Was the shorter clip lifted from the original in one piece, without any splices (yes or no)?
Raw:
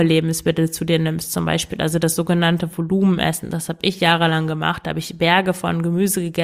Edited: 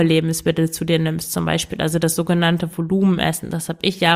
yes